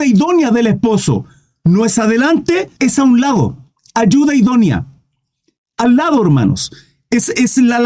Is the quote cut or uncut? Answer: cut